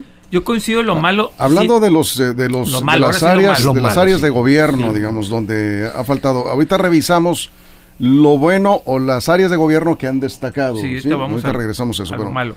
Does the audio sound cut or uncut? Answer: uncut